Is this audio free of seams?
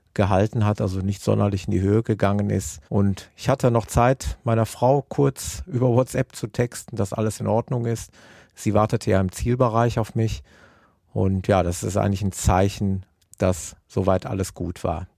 no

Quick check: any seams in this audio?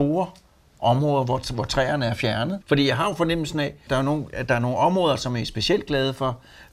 yes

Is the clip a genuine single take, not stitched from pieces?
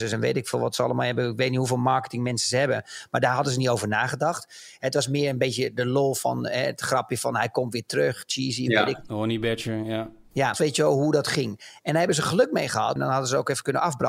no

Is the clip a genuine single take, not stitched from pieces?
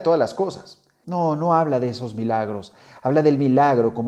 no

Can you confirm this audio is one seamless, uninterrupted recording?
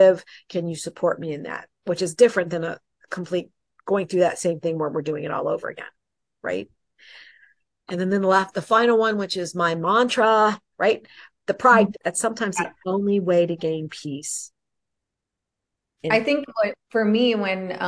no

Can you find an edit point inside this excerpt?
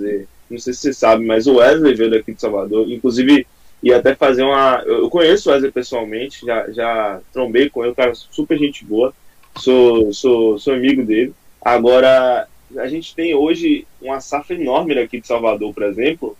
no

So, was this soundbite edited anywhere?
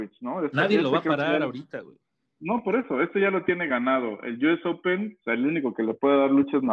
yes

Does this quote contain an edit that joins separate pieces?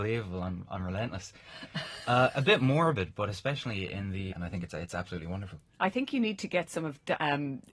yes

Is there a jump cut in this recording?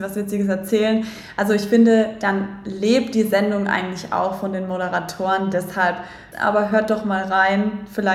yes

